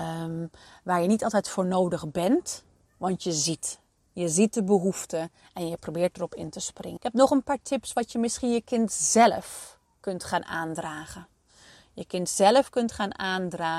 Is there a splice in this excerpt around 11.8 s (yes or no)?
no